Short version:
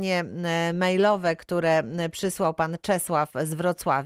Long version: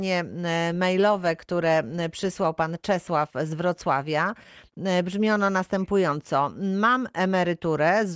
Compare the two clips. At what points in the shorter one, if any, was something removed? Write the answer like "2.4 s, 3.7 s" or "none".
none

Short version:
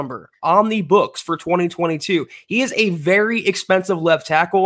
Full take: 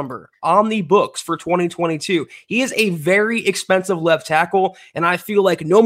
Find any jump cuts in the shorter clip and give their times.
none

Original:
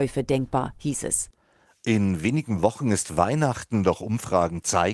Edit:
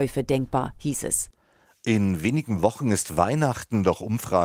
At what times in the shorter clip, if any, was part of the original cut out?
none

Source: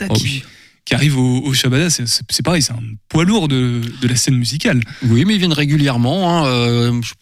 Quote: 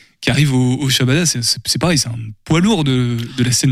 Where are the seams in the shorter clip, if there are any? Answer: none

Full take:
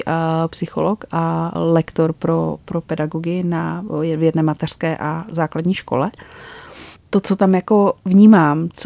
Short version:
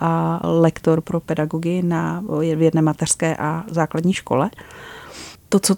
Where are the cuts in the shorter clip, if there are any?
1.0 s

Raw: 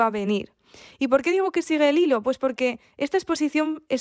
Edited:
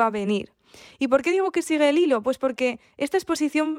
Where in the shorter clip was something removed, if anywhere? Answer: none

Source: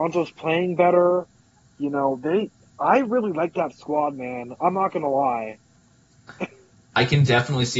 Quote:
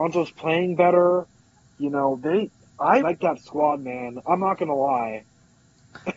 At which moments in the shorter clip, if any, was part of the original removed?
3.0 s

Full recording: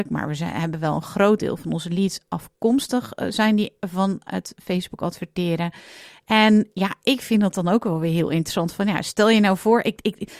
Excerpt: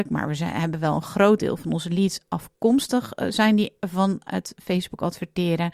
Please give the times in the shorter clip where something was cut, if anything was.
none

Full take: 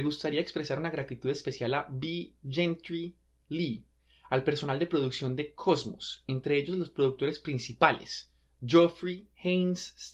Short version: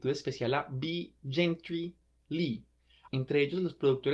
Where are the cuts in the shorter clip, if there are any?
3.1 s

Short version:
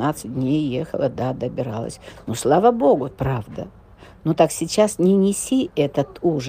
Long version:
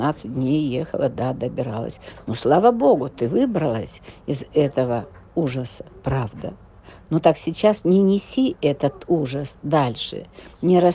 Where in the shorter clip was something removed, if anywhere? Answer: 3.1 s

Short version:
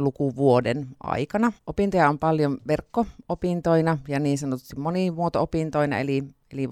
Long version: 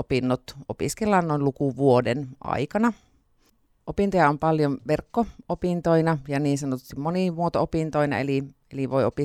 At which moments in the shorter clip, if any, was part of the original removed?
1.6 s

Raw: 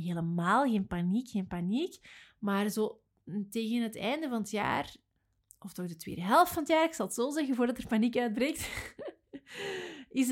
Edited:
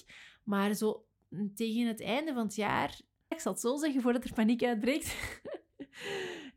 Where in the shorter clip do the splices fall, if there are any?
3.3 s

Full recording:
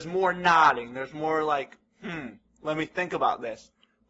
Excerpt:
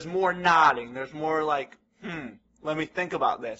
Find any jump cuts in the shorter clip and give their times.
none

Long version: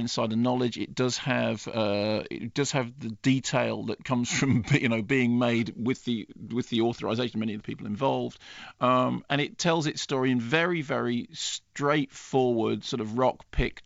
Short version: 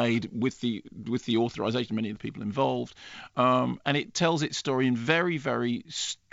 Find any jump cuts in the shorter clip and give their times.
none

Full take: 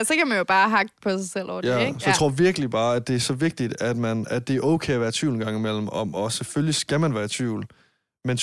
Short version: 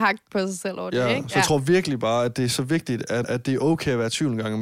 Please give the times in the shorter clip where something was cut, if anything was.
3.2 s

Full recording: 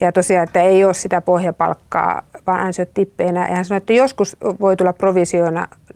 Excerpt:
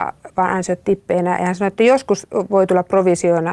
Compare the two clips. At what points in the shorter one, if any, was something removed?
none

